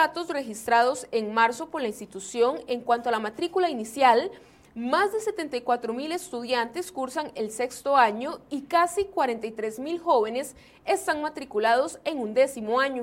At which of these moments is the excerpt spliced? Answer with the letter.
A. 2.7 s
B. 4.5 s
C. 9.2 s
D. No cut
D